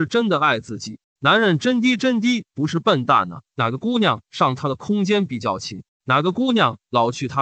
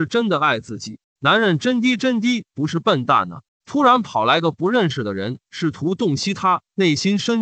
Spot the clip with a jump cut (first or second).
first